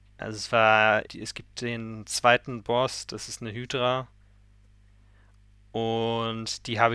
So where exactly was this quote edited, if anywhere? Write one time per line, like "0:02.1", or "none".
0:01.1